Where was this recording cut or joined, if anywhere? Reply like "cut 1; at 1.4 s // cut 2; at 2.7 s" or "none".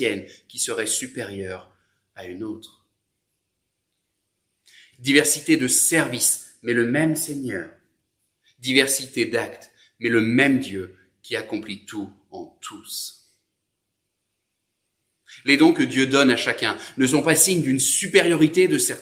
cut 1; at 4.9 s

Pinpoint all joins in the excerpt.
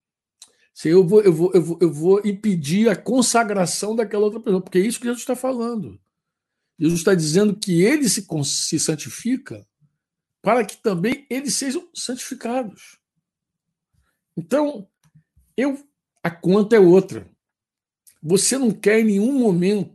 cut 1; at 10.4 s // cut 2; at 16.1 s

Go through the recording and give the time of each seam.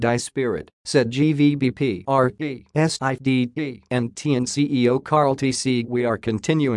cut 1; at 5.8 s

